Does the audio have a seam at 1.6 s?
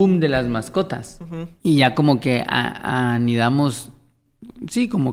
yes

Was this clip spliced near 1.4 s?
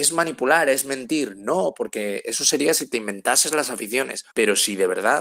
no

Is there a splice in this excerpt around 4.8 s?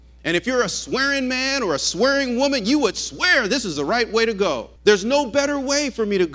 yes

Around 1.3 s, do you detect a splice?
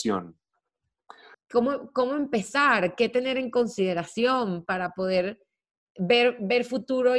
yes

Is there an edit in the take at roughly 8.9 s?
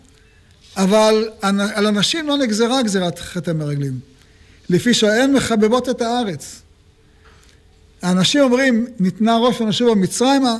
no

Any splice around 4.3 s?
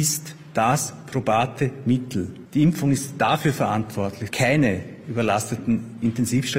yes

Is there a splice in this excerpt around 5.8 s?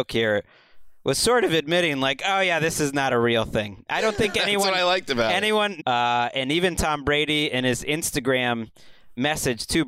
yes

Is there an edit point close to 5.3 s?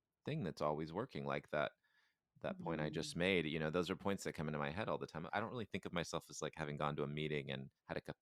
yes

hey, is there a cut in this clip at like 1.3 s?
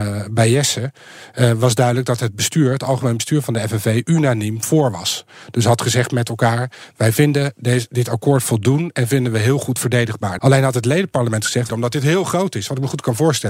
no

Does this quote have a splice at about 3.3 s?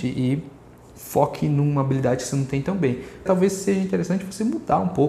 yes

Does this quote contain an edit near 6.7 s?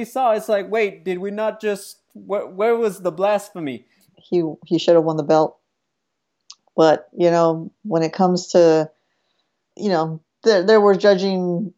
no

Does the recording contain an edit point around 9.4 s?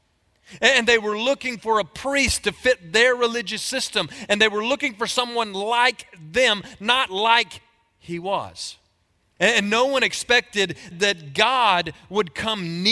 yes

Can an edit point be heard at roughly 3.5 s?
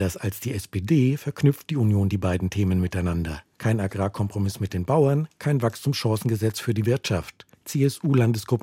no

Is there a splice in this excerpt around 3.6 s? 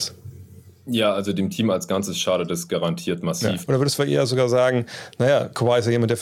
yes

